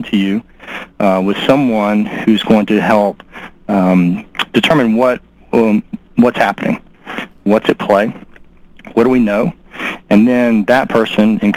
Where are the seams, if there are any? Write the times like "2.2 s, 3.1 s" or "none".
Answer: none